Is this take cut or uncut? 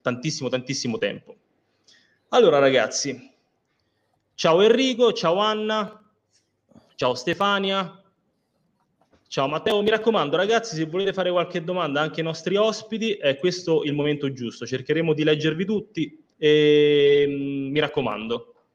cut